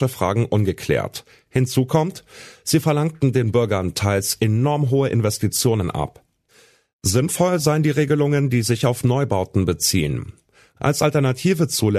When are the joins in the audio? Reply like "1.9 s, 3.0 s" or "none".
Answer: 10.8 s